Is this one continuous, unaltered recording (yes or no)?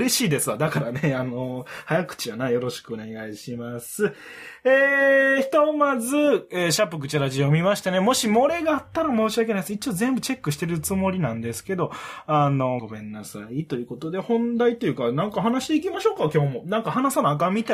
no